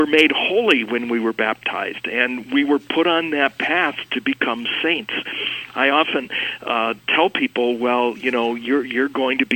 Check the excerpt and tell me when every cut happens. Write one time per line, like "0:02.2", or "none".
none